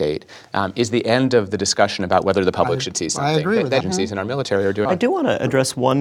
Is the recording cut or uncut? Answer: cut